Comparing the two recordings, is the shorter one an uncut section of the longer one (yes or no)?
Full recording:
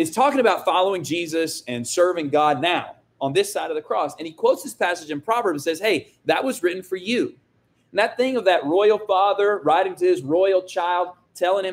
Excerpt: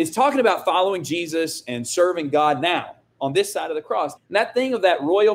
no